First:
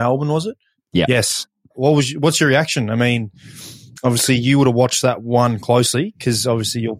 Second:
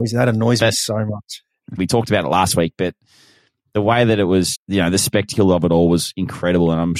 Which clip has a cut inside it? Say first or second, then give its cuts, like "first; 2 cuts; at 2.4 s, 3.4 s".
second; 2 cuts; at 1.8 s, 4.5 s